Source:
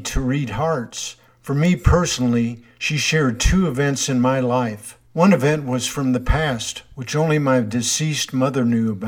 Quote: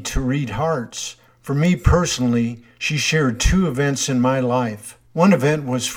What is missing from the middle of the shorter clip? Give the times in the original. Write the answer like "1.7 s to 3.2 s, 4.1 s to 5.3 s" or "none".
none